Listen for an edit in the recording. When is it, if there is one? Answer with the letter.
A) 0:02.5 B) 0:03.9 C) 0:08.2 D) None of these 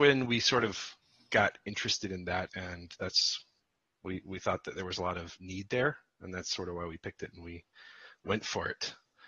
A